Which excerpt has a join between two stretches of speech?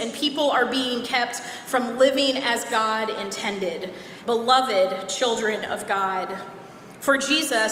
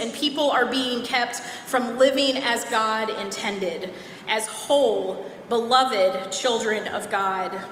first; 1 cut; at 4.2 s

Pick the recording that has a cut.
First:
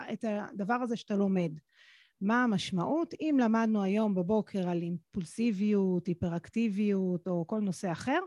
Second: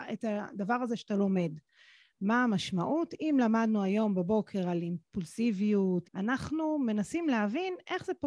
second; 1 cut; at 6.0 s

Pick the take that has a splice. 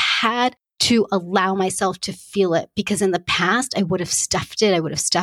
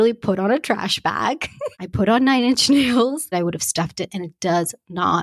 second; 2 cuts; at 1.7 s, 3.3 s

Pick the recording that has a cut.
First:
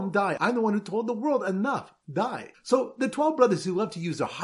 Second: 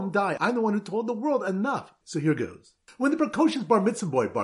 second; 1 cut; at 2.0 s

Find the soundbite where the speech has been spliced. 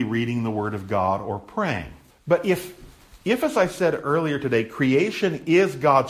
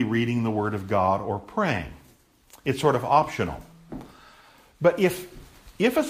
first; 1 cut; at 2.1 s

